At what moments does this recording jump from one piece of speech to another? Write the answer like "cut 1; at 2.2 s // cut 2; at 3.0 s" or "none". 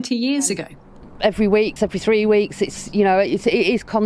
cut 1; at 1.8 s